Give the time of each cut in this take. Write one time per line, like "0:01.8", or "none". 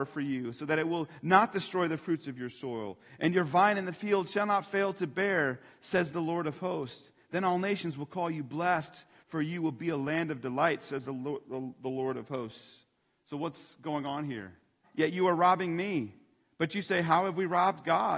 0:14.8